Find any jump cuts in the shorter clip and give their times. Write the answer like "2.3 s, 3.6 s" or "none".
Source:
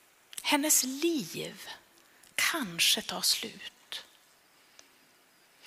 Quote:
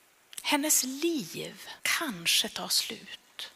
1.8 s